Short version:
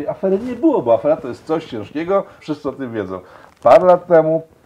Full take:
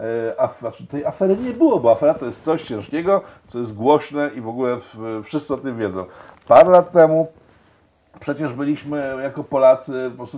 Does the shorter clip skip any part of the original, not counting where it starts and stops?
yes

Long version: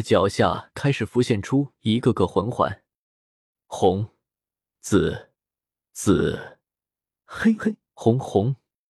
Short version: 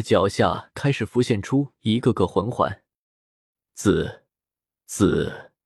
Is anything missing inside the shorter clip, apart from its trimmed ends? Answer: yes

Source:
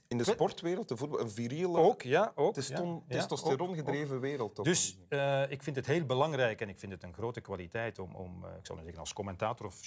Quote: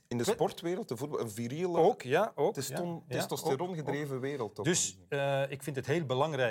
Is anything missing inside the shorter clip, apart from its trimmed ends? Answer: no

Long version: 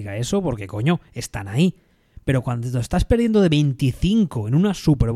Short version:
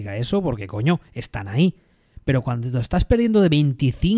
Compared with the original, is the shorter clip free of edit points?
yes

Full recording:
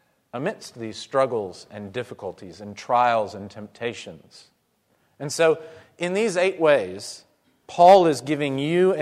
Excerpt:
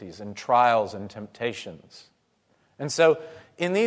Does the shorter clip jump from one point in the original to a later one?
no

